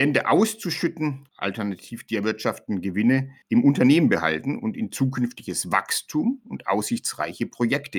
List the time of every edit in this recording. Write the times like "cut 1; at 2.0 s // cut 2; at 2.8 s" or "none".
cut 1; at 1.3 s // cut 2; at 3.4 s